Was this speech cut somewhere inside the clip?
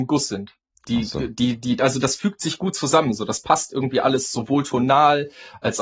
no; 0 cuts

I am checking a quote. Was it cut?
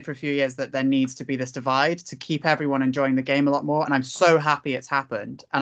no; 0 cuts

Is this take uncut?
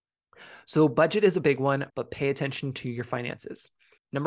no; 1 cut; at 1.9 s

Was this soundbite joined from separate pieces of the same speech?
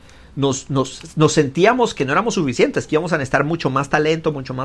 no; 0 cuts

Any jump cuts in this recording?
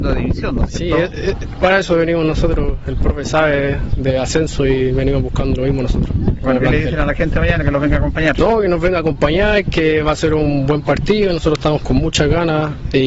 no; 0 cuts

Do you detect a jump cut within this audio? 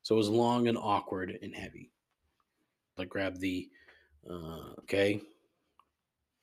yes; 2 cuts; at 3.0 s, 4.8 s

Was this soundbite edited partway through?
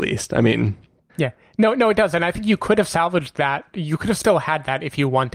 no; 0 cuts

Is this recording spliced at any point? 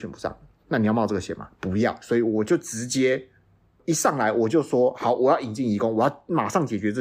no; 0 cuts

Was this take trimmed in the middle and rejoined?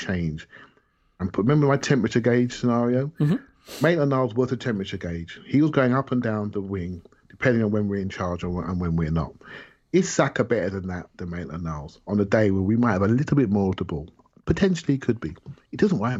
no; 0 cuts

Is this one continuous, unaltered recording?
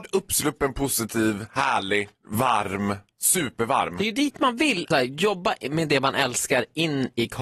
no; 2 cuts; at 2.1 s, 4.9 s

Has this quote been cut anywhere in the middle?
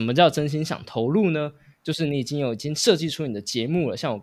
no; 0 cuts

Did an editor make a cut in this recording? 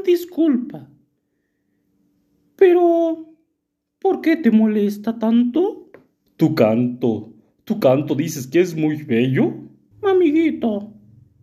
yes; 2 cuts; at 6.3 s, 9.9 s

